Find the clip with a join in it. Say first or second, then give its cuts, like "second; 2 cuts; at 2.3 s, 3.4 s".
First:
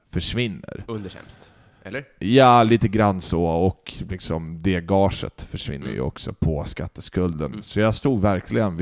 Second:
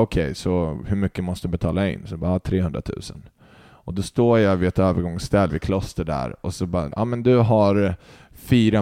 second; 2 cuts; at 5.5 s, 6.9 s